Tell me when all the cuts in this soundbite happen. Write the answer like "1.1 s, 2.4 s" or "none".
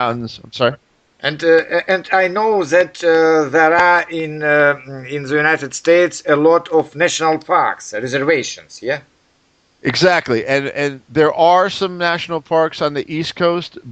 none